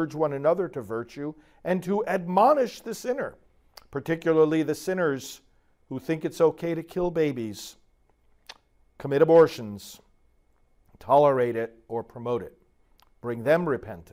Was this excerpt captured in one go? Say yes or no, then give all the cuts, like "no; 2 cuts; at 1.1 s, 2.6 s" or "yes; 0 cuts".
yes; 0 cuts